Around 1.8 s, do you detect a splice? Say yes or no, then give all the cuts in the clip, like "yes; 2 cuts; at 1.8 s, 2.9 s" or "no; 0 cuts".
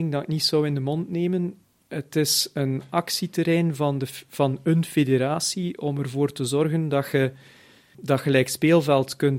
no; 1 cut; at 7.9 s